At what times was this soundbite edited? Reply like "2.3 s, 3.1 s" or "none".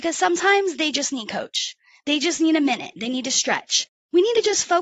none